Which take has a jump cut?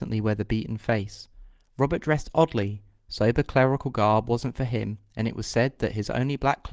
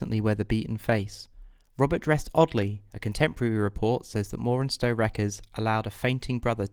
second; 1 cut; at 2.9 s

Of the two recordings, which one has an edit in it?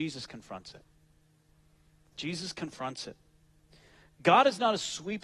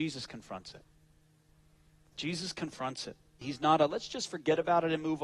second; 1 cut; at 3.4 s

